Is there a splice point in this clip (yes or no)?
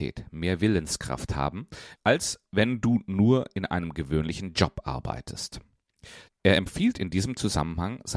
yes